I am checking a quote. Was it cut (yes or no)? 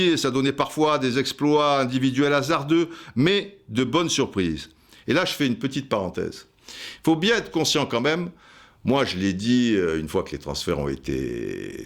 no